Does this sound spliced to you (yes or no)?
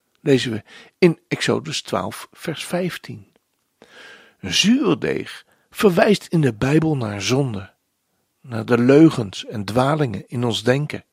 no